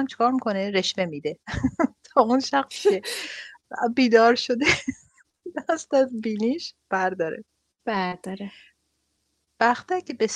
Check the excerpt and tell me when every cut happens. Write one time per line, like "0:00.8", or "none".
none